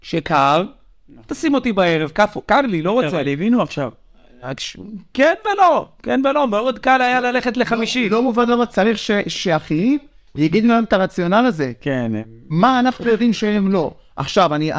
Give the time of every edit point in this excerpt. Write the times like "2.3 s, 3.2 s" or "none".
none